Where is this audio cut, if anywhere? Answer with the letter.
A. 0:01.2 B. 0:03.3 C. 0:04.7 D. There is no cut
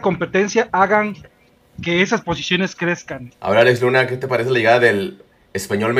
B